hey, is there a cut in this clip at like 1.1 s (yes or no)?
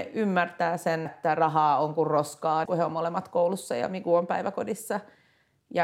yes